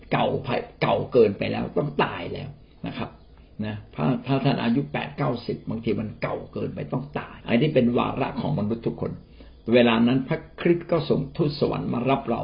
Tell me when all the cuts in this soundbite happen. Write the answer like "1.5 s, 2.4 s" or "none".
7.4 s